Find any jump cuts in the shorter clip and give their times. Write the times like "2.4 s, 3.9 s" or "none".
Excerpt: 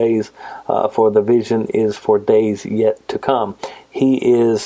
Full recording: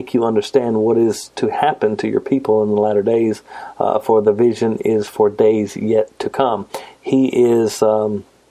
none